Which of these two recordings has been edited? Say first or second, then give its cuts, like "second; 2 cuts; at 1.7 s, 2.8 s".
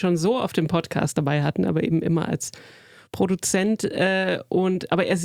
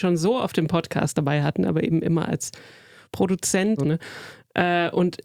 second; 1 cut; at 3.8 s